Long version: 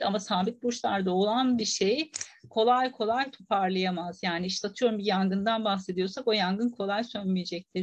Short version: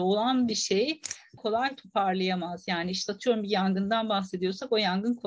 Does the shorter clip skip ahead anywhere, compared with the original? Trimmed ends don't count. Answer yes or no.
yes